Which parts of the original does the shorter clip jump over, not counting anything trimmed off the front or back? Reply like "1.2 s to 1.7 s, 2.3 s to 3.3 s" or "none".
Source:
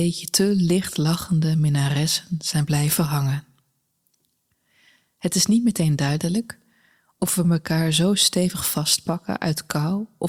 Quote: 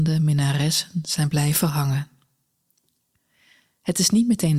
none